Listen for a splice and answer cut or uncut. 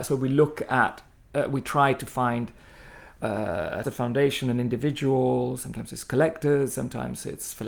cut